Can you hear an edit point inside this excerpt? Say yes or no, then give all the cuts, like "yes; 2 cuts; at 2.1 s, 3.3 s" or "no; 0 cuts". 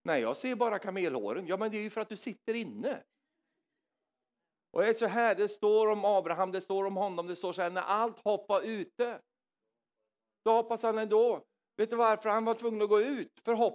no; 0 cuts